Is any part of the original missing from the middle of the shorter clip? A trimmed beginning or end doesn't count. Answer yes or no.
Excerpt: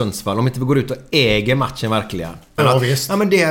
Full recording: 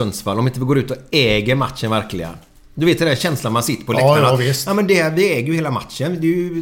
yes